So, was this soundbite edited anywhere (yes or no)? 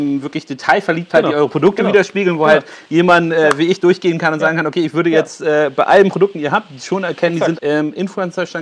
yes